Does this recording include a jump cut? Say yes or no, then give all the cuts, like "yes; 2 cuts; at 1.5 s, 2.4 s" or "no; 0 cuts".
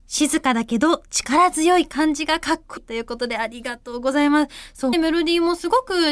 yes; 2 cuts; at 2.8 s, 4.9 s